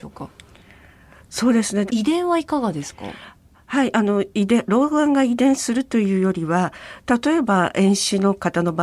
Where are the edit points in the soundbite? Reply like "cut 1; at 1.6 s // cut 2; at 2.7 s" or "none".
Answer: cut 1; at 1.9 s